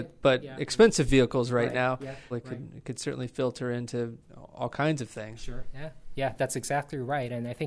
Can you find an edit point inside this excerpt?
yes; 1 cut; at 2.3 s

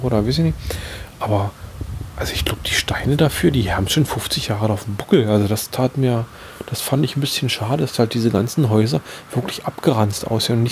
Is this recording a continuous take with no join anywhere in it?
yes; 0 cuts

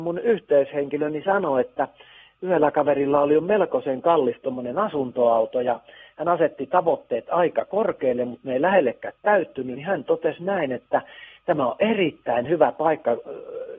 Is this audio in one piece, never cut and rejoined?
yes; 0 cuts

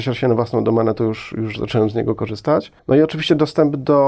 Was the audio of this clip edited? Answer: no; 0 cuts

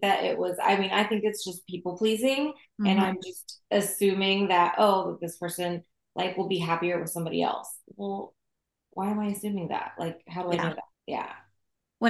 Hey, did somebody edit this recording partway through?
yes; 1 cut; at 10.9 s

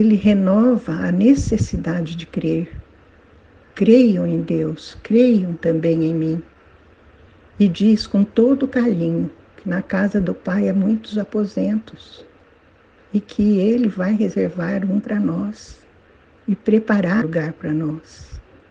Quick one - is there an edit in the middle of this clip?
yes; 1 cut; at 17.2 s

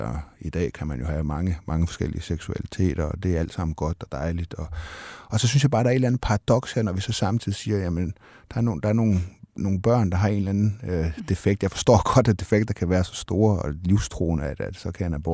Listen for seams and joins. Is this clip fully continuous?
yes; 0 cuts

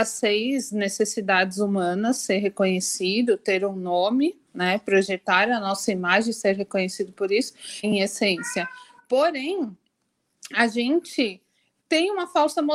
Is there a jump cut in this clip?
yes; 1 cut; at 7.8 s

